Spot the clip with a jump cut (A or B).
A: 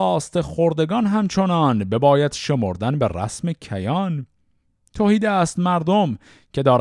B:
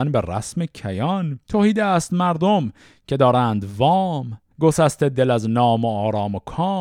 B